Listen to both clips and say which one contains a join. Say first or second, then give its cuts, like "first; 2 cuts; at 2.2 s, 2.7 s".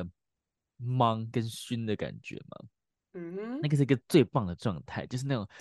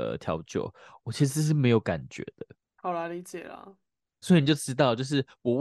second; 1 cut; at 4.2 s